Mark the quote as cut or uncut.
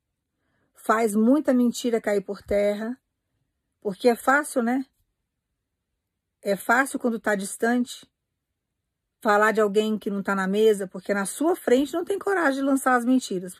uncut